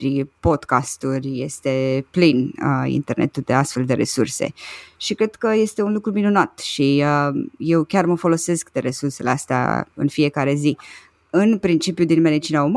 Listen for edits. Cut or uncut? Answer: uncut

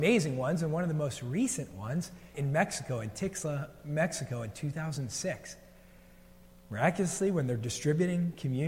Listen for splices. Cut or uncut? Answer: cut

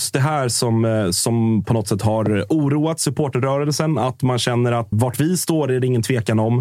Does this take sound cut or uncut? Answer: cut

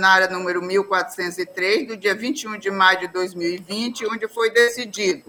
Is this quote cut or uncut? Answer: uncut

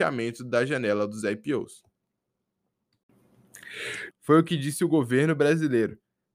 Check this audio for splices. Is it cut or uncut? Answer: cut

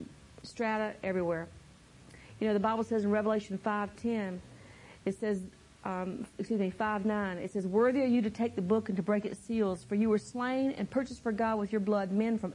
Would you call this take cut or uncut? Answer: uncut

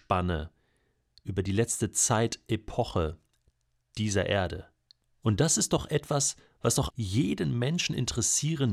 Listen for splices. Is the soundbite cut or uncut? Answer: cut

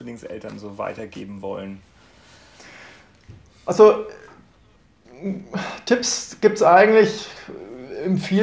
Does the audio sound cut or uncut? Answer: uncut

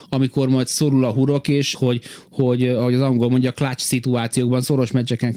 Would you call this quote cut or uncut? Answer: cut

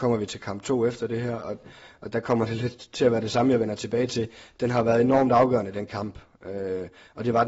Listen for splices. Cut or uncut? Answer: uncut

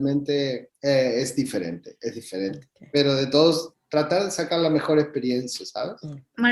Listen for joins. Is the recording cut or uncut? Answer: uncut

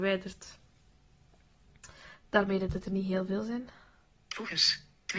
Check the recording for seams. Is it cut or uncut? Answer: uncut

